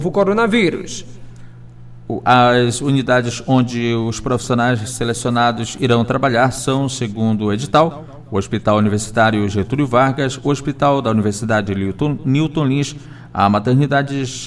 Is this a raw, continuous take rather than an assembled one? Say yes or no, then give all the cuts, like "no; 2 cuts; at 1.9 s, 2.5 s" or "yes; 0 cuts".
yes; 0 cuts